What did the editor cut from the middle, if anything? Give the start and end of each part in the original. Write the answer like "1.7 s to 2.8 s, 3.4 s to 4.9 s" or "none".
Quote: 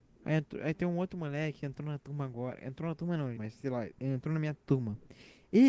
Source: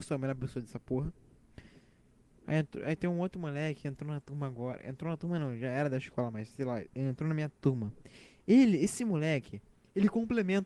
5.6 s to 6.3 s